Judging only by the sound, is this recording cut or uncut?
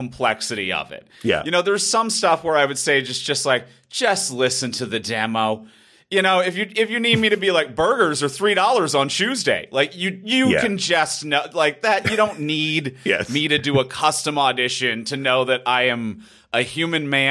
uncut